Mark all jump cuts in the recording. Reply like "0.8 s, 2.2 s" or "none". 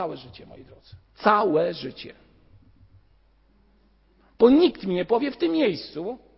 1.0 s